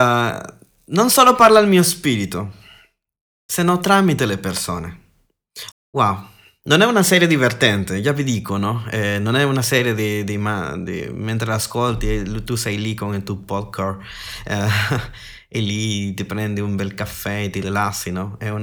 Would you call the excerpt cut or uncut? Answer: cut